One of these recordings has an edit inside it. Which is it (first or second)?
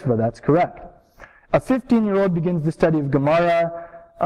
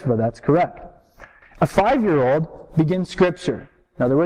second